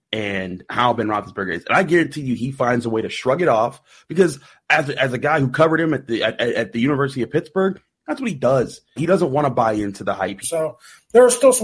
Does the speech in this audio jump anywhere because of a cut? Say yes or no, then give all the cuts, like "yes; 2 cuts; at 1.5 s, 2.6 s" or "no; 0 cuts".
yes; 2 cuts; at 9.0 s, 10.4 s